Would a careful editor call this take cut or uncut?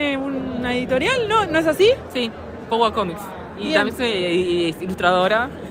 uncut